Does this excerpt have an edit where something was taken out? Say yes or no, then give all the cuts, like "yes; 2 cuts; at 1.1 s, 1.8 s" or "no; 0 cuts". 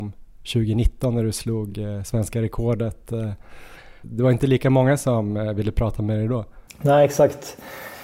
no; 0 cuts